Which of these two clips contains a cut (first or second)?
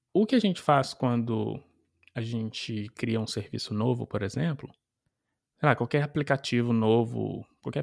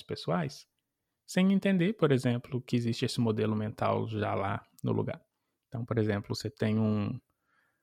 first